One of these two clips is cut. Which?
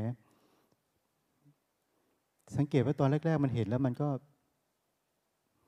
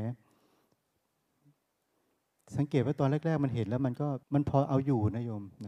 second; 1 cut; at 4.2 s

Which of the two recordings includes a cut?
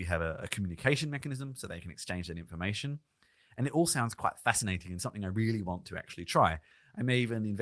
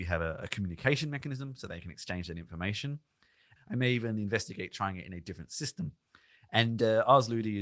second; 1 cut; at 3.6 s

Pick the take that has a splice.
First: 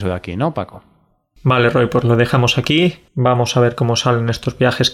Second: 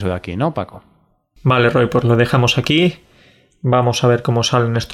first; 1 cut; at 3.1 s

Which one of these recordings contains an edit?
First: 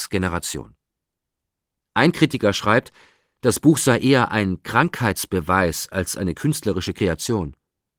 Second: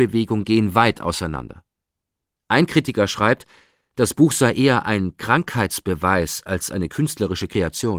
first; 1 cut; at 1.8 s

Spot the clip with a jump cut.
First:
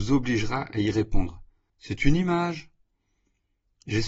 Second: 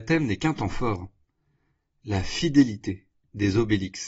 first; 1 cut; at 1.7 s

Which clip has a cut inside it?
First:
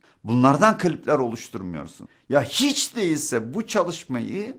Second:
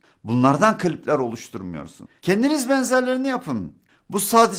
second; 1 cut; at 2.2 s

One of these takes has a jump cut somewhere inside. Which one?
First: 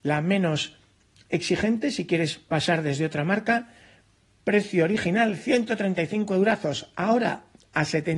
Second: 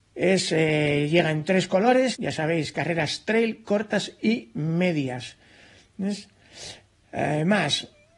second; 1 cut; at 2.2 s

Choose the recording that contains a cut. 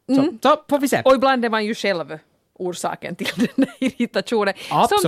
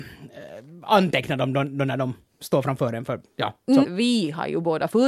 second; 1 cut; at 3.8 s

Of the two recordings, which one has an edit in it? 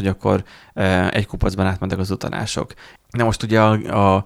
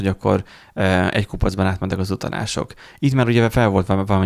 first; 1 cut; at 3.0 s

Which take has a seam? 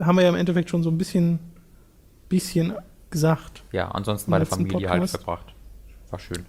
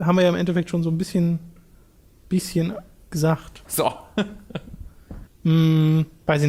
second; 2 cuts; at 3.6 s, 5.3 s

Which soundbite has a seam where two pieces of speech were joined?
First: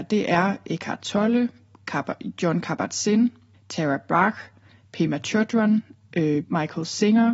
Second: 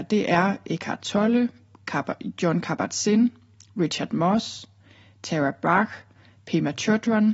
first; 2 cuts; at 3.5 s, 6.4 s

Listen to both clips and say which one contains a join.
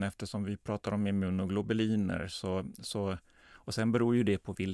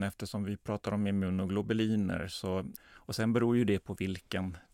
second; 1 cut; at 2.8 s

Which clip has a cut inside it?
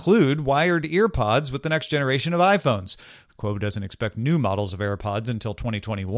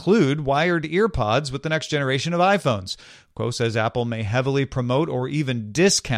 first; 1 cut; at 3.3 s

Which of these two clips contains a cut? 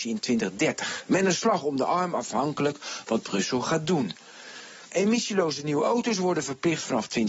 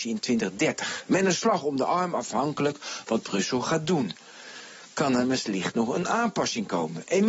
first; 1 cut; at 4.9 s

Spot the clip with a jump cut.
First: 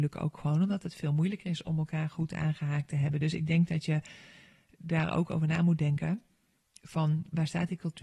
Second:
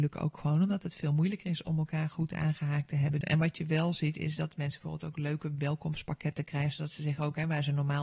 second; 1 cut; at 3.2 s

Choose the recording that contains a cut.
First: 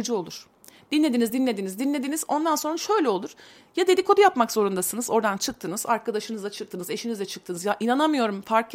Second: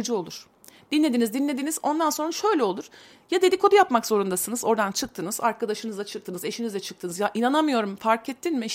second; 1 cut; at 1.3 s

